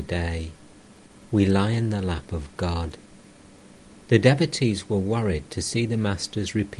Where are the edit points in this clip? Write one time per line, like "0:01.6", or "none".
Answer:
0:04.0